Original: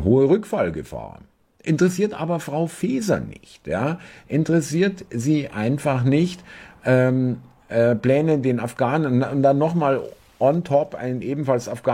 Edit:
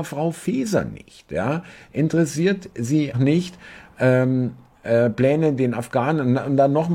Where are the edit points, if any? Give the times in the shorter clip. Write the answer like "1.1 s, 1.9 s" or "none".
3.1 s